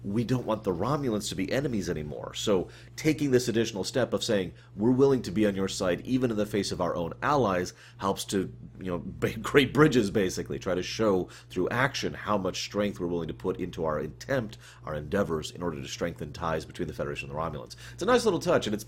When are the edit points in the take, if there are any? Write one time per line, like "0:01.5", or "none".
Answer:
none